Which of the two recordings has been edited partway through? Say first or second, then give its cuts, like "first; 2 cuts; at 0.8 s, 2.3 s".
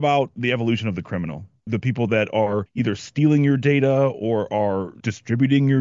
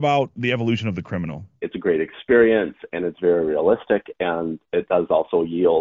second; 1 cut; at 1.6 s